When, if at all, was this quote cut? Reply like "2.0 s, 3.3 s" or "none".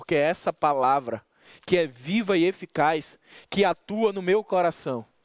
none